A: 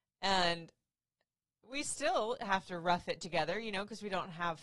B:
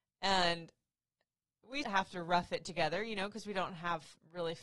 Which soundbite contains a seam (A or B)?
B